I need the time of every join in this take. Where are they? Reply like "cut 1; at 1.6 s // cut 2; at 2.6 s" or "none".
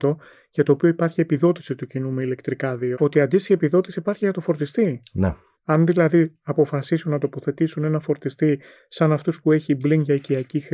cut 1; at 2.9 s